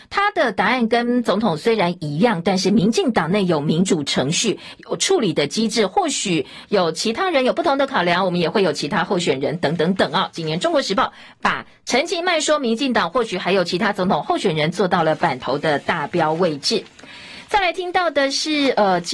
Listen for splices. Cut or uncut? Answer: uncut